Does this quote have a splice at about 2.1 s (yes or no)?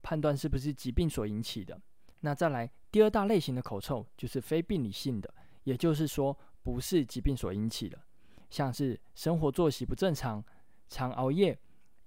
no